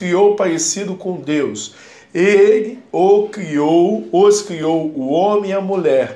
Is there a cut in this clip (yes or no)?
no